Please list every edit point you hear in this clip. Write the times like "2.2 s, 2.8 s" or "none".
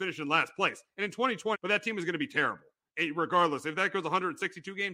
1.5 s